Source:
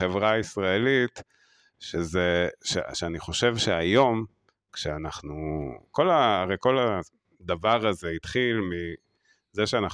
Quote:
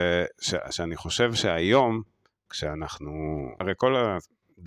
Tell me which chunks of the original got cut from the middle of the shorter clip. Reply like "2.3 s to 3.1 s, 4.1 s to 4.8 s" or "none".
5.8 s to 6.4 s